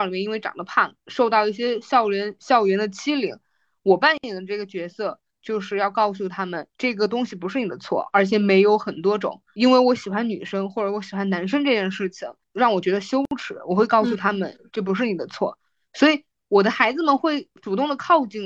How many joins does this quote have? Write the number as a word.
one